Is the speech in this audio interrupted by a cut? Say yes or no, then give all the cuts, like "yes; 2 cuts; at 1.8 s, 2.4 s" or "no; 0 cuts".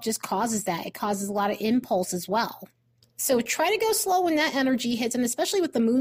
no; 0 cuts